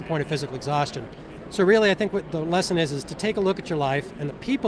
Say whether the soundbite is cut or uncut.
uncut